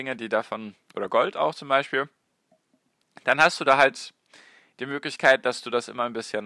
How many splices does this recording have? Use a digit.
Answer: 0